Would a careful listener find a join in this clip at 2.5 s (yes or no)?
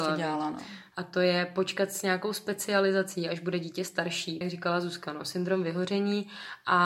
no